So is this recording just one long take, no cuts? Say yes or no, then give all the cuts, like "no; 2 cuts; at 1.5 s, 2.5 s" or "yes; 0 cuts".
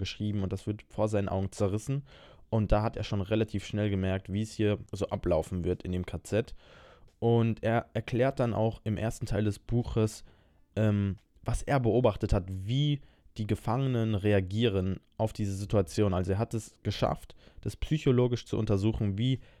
yes; 0 cuts